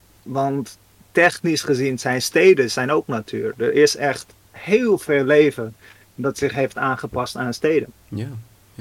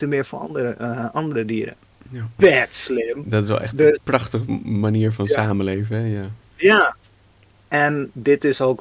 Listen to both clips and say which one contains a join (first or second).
second